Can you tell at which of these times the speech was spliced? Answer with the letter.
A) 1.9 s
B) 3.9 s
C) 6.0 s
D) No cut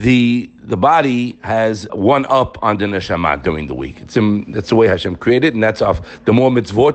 A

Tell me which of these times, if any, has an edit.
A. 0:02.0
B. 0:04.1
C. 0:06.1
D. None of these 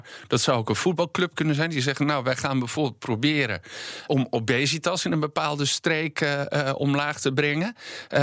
B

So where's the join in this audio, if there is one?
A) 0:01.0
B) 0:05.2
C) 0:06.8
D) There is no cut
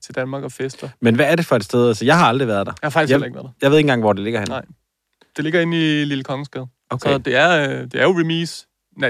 C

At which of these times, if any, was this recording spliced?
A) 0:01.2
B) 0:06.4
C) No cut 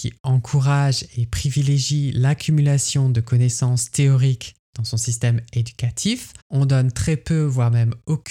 B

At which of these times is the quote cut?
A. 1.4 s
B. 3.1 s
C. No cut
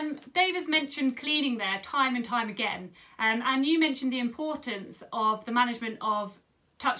C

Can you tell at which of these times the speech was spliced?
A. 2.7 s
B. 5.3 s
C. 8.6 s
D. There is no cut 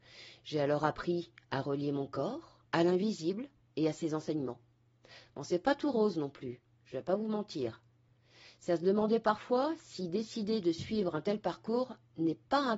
A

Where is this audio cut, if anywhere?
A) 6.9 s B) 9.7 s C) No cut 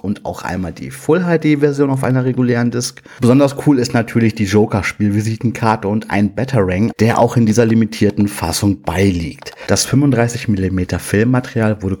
A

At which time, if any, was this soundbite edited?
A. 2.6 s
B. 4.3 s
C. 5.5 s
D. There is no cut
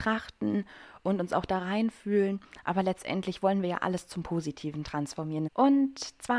C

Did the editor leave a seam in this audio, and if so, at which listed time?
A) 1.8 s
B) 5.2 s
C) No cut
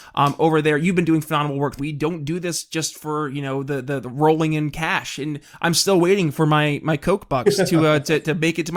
A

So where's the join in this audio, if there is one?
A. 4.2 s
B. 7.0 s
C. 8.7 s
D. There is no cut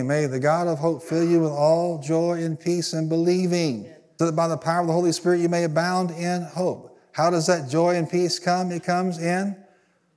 A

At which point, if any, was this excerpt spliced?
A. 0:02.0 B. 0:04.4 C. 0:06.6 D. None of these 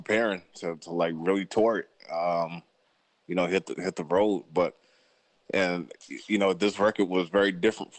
D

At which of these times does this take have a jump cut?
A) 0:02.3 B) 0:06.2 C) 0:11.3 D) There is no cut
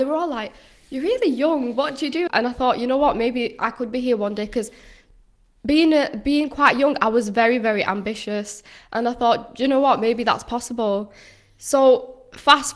A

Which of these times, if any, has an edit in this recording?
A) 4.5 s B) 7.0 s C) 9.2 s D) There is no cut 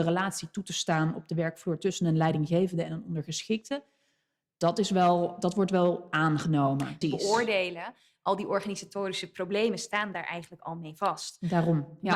B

